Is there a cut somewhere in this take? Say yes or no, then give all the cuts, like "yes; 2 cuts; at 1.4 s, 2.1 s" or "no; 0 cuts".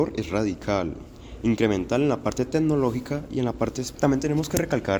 yes; 1 cut; at 3.9 s